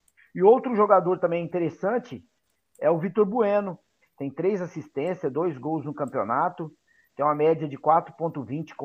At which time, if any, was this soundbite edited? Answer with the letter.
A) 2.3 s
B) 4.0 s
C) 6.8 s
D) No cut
B